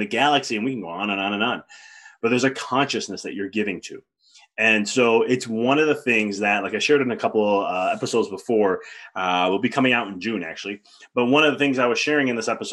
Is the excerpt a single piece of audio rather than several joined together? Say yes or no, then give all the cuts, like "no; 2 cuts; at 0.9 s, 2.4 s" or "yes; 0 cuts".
yes; 0 cuts